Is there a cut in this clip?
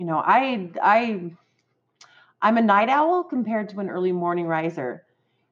no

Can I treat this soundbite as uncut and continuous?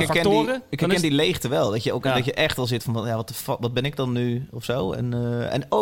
yes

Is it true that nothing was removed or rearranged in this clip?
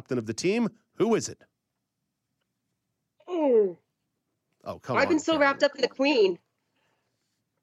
yes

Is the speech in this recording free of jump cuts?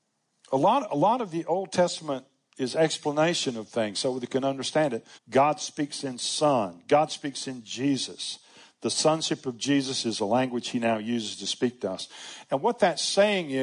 no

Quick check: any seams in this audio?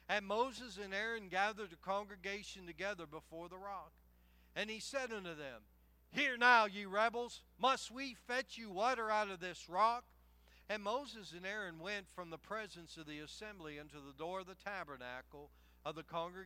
yes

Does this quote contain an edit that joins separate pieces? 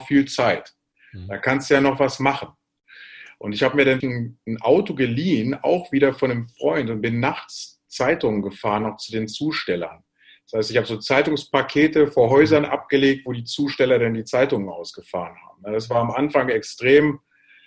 yes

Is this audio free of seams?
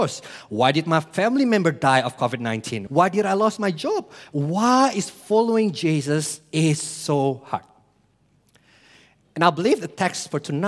no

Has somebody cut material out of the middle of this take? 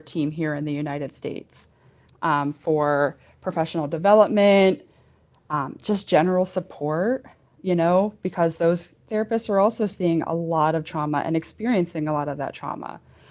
no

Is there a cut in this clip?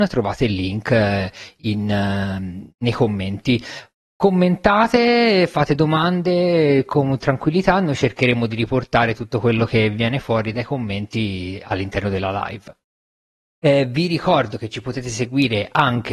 yes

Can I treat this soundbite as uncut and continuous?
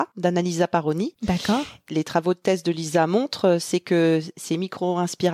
yes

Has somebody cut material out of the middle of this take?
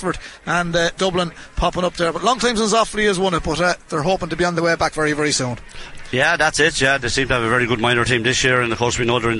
no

